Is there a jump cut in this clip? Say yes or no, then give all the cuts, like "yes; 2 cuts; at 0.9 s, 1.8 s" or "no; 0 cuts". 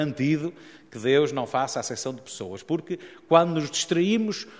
no; 0 cuts